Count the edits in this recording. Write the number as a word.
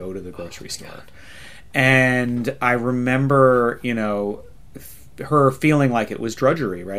zero